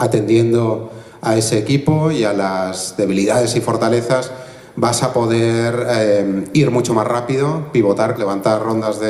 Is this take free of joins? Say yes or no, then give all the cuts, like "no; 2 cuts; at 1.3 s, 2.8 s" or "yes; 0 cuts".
no; 1 cut; at 8.2 s